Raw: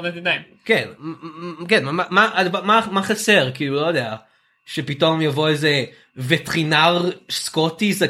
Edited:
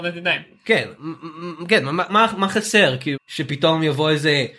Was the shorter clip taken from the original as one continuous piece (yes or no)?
no